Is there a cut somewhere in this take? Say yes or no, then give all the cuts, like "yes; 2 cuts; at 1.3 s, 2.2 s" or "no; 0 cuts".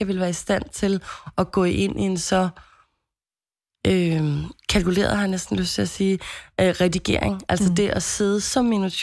no; 0 cuts